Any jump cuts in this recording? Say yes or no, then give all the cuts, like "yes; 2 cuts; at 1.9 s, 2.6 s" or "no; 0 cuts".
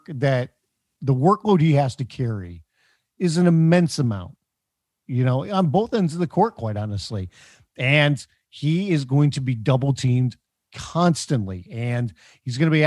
no; 0 cuts